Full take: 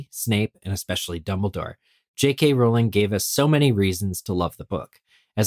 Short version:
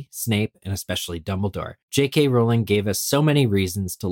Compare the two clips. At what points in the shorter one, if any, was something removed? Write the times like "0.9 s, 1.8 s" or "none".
1.8 s